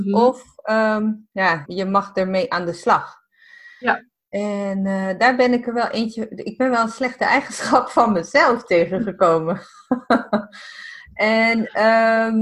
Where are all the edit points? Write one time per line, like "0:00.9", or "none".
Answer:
0:01.7